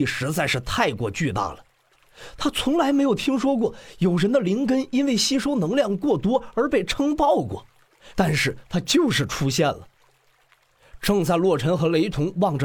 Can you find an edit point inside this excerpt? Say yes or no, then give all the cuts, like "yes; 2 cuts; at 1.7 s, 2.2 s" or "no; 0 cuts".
yes; 1 cut; at 8.1 s